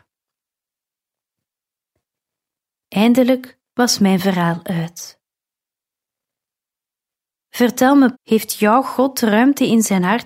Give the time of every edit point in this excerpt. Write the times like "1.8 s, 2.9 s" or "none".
8.1 s